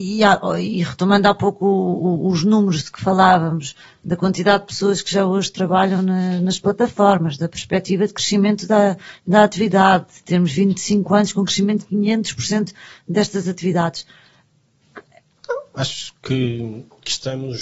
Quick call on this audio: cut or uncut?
cut